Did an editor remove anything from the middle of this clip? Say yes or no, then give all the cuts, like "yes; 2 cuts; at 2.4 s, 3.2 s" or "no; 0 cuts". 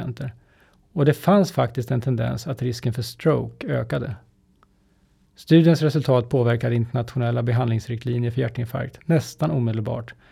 no; 0 cuts